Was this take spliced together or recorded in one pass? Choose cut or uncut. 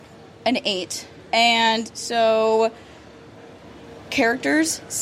uncut